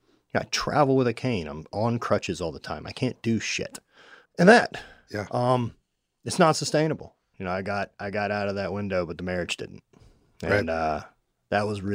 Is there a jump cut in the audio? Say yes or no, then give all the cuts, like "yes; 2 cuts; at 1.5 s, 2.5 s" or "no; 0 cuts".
yes; 2 cuts; at 4.3 s, 7.3 s